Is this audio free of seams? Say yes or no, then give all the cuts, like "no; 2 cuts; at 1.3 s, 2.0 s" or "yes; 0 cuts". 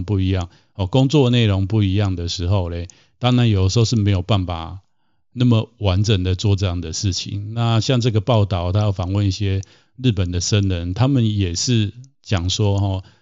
yes; 0 cuts